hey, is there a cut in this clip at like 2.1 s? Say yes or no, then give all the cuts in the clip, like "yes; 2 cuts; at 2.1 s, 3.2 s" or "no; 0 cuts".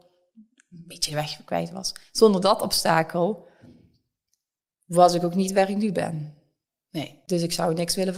no; 0 cuts